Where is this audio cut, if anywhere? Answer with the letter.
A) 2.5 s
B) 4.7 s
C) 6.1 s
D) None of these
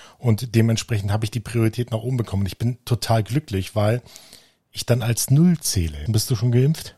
C